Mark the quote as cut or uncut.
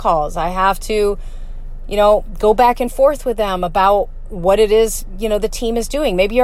uncut